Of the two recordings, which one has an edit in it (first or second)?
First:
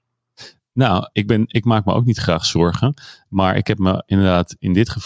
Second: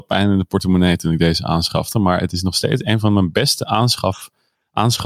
first